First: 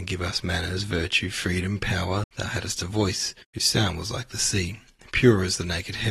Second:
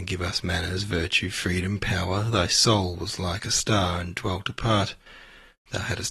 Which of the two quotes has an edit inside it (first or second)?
first